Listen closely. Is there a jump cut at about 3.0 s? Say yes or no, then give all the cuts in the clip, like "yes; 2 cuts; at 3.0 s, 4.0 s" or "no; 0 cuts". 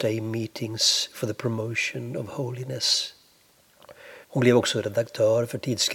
no; 1 cut; at 4.2 s